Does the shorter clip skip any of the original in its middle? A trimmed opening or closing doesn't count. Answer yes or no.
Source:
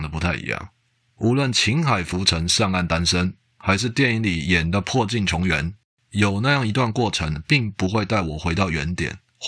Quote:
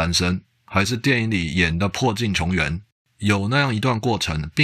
no